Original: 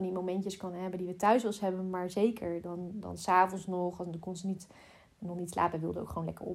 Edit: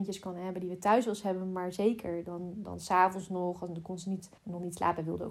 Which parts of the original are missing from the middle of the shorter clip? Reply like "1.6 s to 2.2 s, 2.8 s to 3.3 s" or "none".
4.7 s to 5.1 s